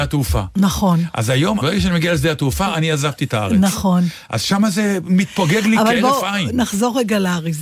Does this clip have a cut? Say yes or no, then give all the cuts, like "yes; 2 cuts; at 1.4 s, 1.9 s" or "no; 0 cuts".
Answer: yes; 1 cut; at 1.6 s